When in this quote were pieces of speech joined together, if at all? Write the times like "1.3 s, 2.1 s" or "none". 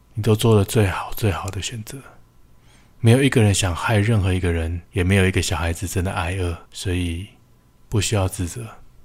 4.8 s, 6.7 s